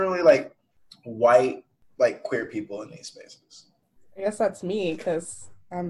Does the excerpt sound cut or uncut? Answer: uncut